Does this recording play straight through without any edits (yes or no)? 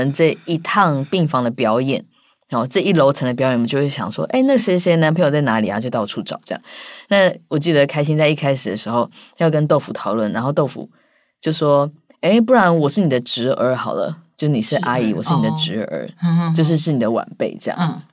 yes